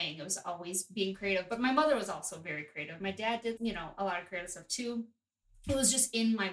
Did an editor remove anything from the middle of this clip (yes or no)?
yes